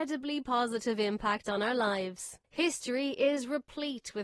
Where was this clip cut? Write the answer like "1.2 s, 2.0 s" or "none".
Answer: 2.4 s